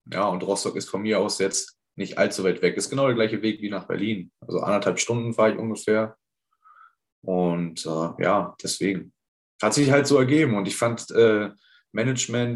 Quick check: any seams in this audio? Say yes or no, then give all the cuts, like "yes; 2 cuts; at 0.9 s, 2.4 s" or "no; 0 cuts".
no; 0 cuts